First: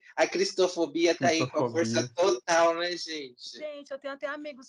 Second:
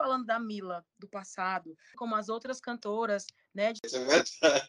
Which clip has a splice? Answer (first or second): second